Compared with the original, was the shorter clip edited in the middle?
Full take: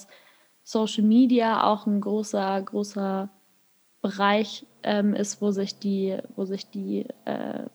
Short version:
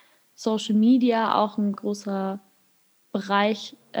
yes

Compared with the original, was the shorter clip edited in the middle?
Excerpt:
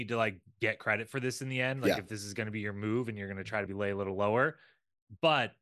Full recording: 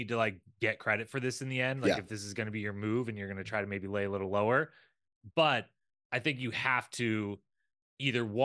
yes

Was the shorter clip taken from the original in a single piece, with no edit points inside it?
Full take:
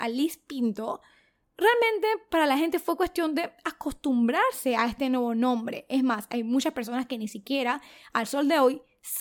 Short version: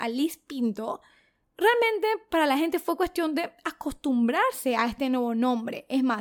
yes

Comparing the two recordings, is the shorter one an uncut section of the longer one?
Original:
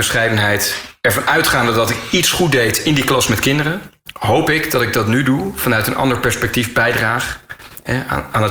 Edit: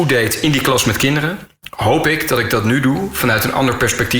yes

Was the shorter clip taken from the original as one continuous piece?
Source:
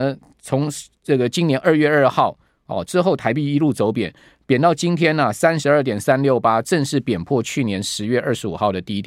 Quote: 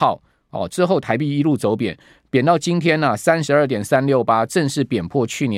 yes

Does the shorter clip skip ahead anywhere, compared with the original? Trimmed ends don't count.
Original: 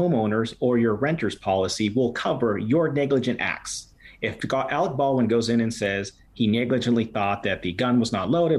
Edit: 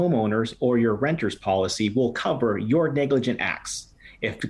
no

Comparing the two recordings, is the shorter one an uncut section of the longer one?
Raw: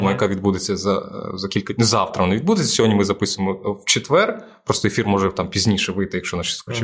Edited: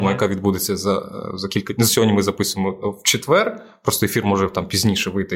no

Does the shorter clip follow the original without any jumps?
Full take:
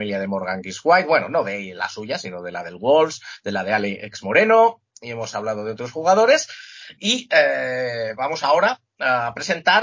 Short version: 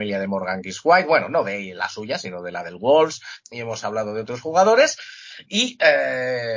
no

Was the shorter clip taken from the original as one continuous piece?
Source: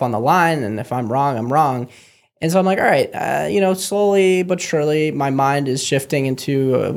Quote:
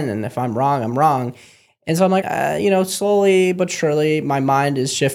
no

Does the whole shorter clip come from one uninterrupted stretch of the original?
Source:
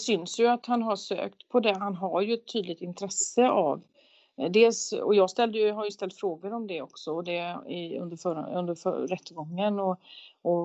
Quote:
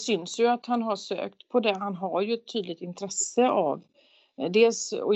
yes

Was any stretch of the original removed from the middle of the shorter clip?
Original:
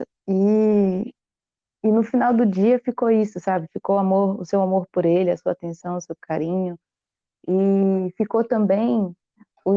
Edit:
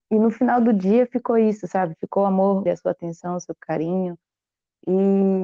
yes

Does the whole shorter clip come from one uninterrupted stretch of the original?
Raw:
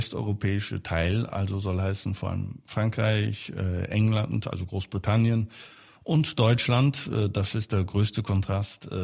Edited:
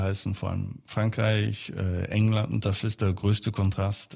no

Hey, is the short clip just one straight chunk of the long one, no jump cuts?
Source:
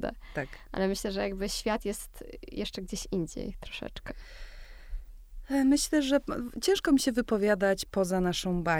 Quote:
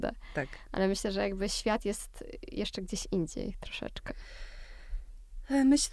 yes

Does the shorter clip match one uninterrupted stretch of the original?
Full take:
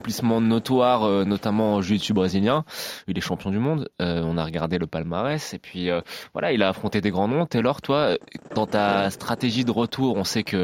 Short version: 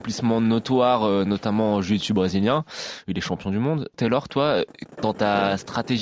no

